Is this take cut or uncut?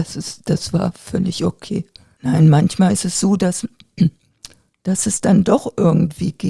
cut